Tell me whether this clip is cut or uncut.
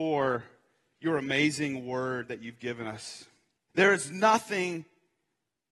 cut